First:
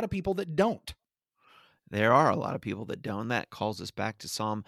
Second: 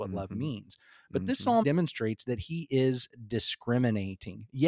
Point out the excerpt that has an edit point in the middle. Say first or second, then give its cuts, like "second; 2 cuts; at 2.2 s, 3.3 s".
second; 1 cut; at 1.6 s